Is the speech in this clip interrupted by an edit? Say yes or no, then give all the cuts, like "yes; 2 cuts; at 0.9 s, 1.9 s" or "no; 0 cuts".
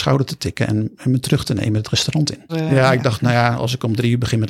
yes; 1 cut; at 2.5 s